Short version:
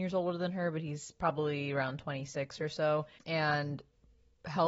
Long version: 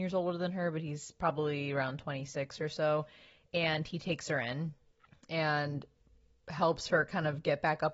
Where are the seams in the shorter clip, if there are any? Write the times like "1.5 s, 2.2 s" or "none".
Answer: 3.2 s